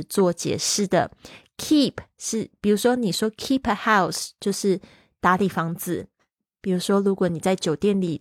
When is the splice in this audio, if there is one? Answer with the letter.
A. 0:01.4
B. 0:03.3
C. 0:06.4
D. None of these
D